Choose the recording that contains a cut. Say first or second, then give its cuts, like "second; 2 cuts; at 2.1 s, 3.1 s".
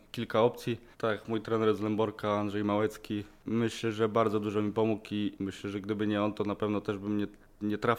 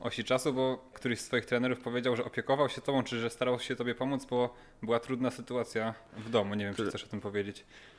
first; 1 cut; at 0.9 s